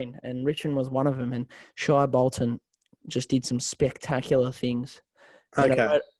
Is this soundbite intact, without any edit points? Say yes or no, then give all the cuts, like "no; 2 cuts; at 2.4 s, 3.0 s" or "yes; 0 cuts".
yes; 0 cuts